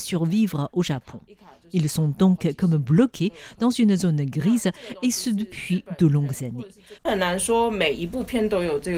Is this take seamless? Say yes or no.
no